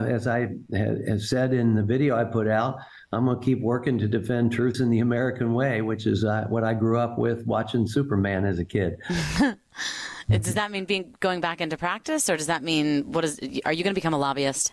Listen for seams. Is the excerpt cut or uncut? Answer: cut